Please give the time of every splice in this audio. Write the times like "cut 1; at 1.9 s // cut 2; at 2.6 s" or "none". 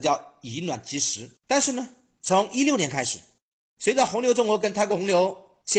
cut 1; at 1.4 s